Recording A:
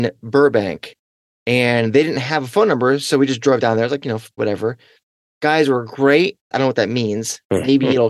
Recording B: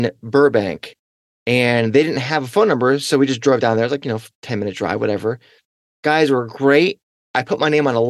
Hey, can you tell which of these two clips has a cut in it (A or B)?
A